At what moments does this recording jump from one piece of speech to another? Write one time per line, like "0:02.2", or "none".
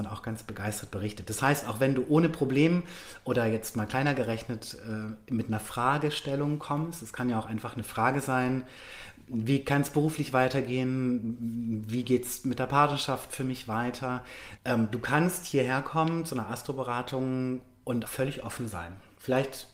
0:14.6
0:18.1